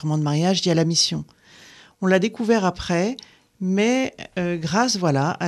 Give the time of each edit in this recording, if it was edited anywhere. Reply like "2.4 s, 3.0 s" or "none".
none